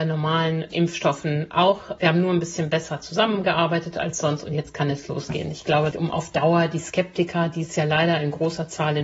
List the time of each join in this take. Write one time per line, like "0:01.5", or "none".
0:05.9